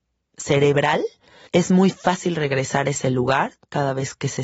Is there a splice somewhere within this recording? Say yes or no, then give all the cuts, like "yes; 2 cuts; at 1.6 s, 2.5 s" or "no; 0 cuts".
yes; 1 cut; at 1.5 s